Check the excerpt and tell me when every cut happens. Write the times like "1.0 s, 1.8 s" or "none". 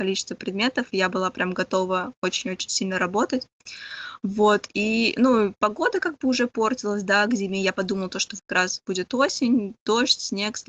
8.4 s